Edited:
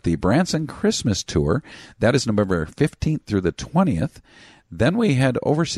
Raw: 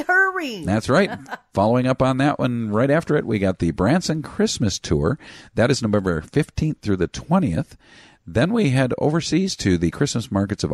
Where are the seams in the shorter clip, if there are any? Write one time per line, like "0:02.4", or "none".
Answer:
none